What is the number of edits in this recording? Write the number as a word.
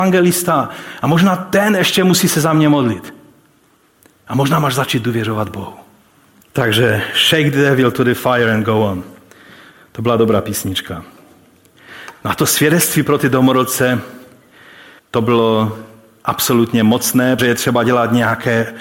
two